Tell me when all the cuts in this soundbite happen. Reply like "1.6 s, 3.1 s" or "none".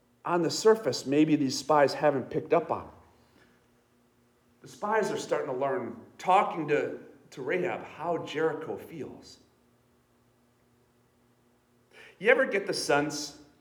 none